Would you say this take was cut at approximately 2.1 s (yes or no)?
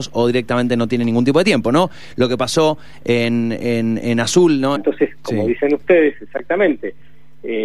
no